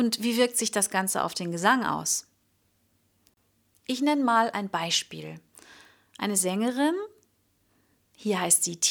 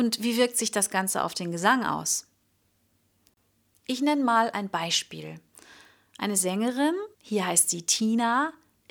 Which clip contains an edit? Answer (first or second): second